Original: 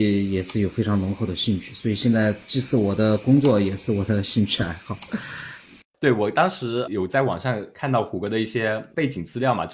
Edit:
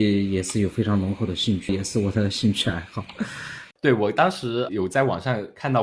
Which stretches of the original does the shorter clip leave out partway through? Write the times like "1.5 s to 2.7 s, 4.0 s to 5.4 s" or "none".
1.7 s to 3.6 s, 5.6 s to 5.9 s